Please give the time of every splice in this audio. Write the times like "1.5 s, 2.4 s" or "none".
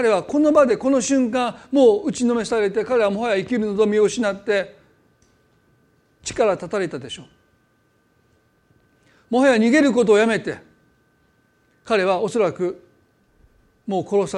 none